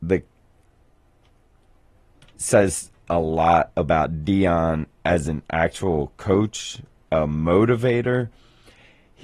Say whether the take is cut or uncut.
cut